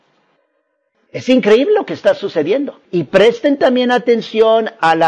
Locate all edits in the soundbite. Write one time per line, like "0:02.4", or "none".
0:00.9
0:02.8